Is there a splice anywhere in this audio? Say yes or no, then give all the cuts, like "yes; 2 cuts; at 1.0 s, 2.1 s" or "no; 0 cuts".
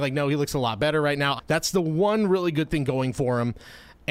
yes; 1 cut; at 1.4 s